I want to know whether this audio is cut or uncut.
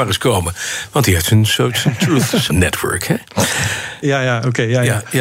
cut